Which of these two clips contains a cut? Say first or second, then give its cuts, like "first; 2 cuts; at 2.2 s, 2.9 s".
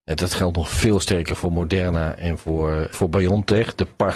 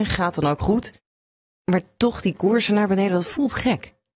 first; 1 cut; at 2.9 s